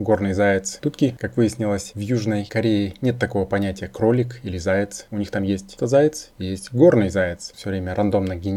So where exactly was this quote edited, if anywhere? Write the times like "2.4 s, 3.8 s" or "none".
5.8 s, 7.5 s